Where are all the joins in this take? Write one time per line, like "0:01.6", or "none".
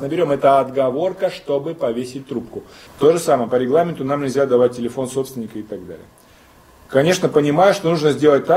0:02.9